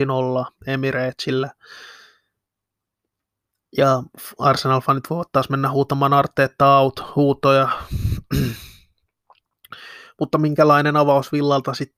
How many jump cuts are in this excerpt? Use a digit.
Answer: 0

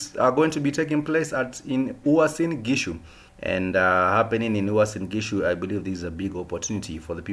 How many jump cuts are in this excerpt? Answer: 1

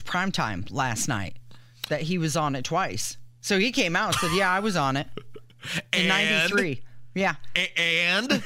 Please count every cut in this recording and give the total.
0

